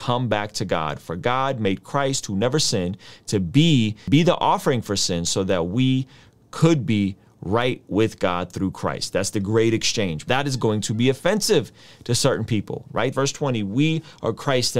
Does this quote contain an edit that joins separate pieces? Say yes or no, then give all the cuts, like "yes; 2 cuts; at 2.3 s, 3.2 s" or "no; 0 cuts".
yes; 2 cuts; at 10.3 s, 13.1 s